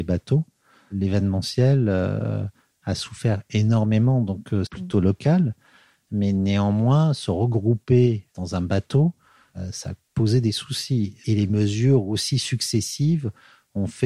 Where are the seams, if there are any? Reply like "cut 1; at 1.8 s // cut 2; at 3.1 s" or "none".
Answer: cut 1; at 4.7 s